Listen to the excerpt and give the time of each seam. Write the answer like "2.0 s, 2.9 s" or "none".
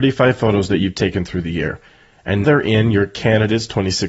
2.4 s